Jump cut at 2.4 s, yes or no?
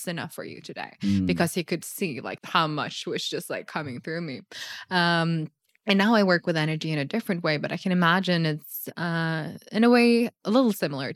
yes